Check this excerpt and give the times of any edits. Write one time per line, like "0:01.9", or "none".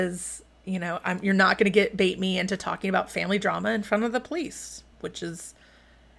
0:04.9